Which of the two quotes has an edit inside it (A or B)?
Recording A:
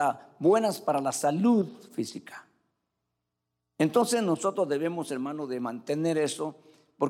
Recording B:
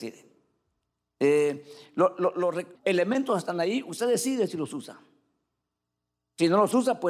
B